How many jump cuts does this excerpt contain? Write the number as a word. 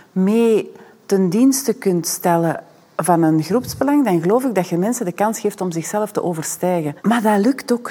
zero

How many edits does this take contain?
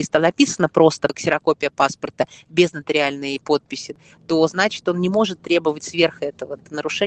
zero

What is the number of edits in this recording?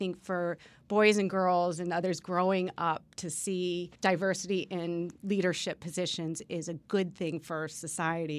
one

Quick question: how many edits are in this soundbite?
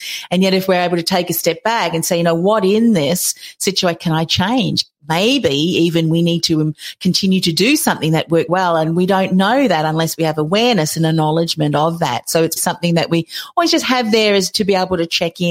three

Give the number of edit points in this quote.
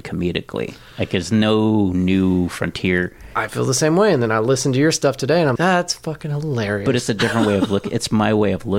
one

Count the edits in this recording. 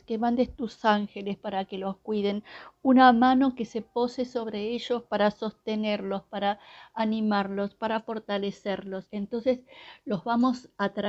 one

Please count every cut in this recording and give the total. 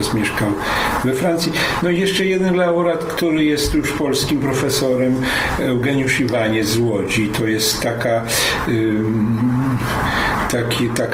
zero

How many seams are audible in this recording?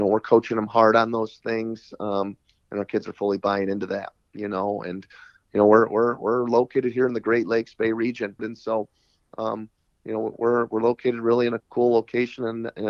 three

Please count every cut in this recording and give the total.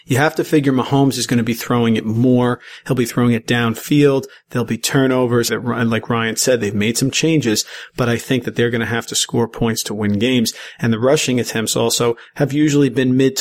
one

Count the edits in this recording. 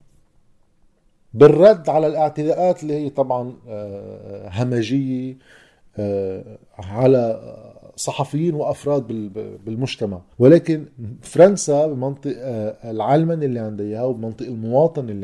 two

